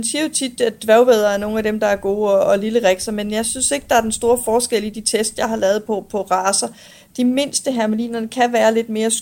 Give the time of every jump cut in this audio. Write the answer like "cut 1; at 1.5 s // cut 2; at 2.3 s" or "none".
none